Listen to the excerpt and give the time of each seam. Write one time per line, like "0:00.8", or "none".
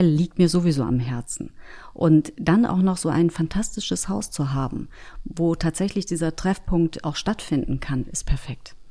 none